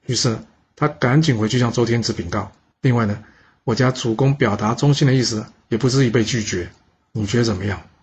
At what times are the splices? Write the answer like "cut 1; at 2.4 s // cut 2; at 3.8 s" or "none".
cut 1; at 2.7 s